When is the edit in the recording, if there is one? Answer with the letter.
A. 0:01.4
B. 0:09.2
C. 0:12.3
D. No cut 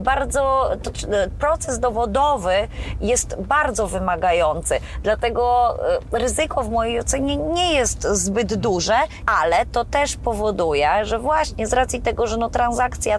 B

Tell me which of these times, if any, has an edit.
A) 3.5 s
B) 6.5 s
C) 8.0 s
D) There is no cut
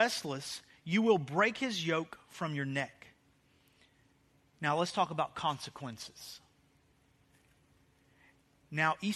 D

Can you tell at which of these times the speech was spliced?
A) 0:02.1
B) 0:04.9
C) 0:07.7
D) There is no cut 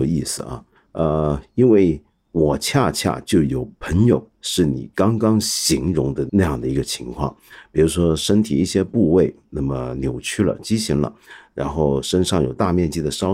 D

